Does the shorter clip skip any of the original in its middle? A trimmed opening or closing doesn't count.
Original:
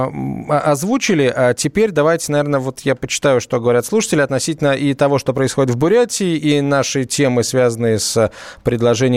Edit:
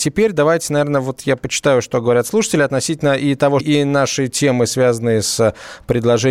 yes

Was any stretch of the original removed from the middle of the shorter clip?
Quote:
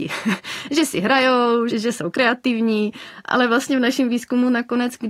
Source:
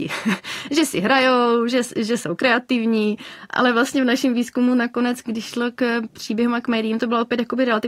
yes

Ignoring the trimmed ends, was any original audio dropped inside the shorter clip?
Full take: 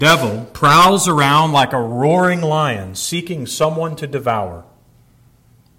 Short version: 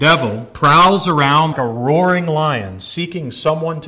yes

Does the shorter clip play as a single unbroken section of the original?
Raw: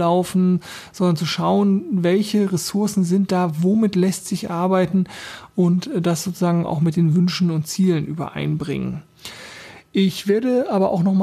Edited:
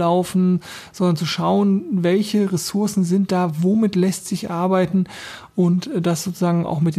yes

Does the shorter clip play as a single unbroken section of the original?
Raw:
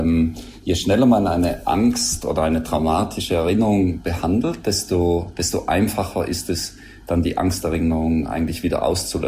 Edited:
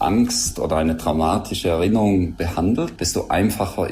no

